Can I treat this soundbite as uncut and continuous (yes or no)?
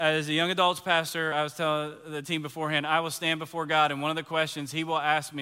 yes